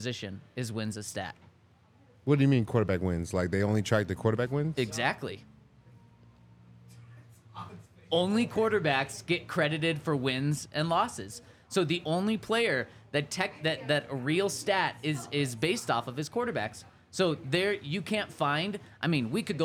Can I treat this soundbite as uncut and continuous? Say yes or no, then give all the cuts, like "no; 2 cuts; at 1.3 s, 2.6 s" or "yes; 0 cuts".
yes; 0 cuts